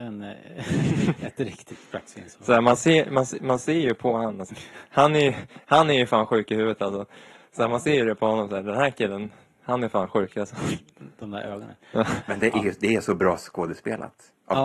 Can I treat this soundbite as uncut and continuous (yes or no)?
no